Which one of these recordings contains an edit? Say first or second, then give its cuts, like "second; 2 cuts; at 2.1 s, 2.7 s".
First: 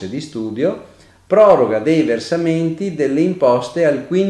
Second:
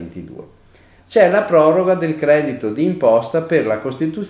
second; 1 cut; at 1.0 s